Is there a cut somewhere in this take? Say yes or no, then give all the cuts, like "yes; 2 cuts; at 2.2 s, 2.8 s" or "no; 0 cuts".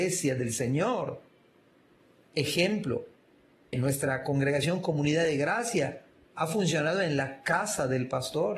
yes; 1 cut; at 3.7 s